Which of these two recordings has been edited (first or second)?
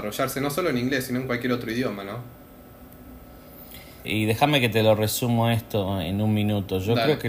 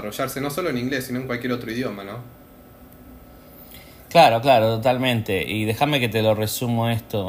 first